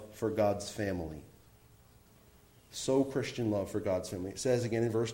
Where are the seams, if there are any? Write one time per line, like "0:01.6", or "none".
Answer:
none